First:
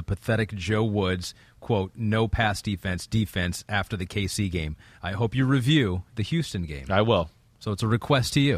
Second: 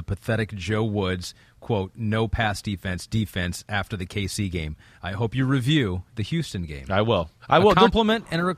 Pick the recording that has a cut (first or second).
second